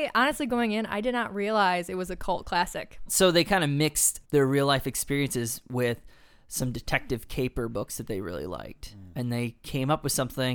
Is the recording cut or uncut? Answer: cut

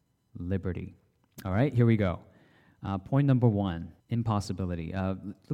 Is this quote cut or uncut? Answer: cut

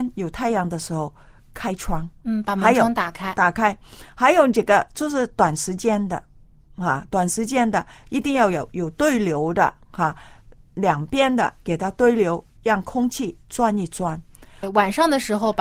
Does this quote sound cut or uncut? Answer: cut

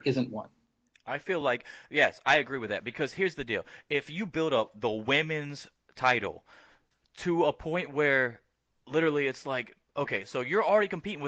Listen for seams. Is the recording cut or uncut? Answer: uncut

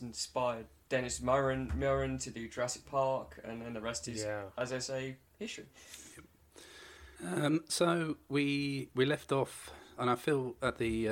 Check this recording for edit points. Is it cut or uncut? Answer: cut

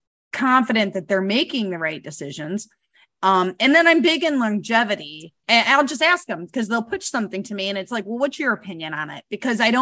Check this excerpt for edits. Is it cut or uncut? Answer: cut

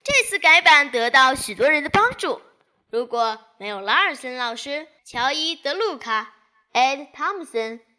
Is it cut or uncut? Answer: cut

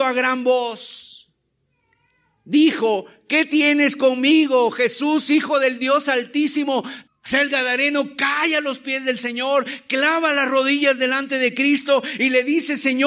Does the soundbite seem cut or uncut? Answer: cut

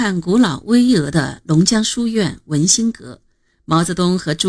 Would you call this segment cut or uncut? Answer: uncut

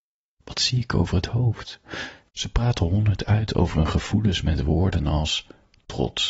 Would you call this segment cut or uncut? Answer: cut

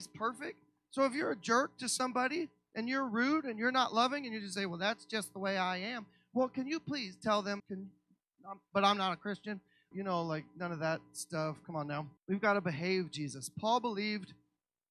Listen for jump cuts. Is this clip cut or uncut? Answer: cut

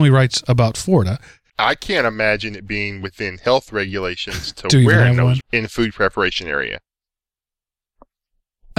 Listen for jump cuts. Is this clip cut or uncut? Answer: cut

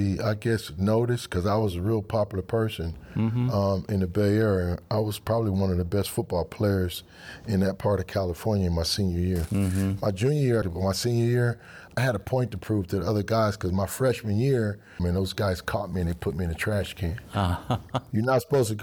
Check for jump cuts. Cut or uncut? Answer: cut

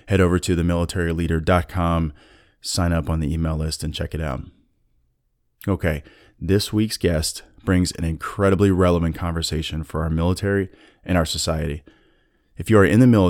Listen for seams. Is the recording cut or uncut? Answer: uncut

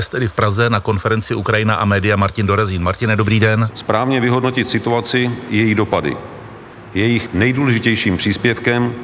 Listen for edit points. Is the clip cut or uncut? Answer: cut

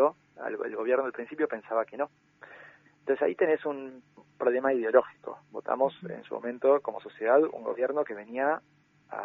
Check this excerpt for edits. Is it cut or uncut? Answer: uncut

